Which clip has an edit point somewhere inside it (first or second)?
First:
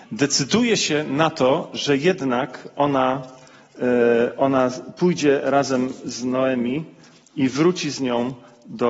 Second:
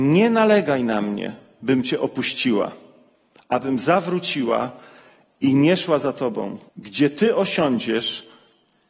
second